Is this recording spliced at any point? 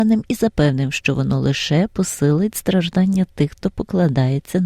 no; 0 cuts

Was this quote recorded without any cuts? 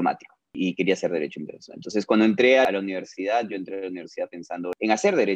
yes; 0 cuts

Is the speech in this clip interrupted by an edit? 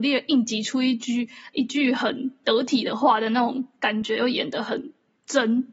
no; 0 cuts

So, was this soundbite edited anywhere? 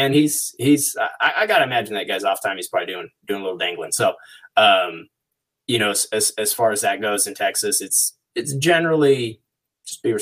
no; 0 cuts

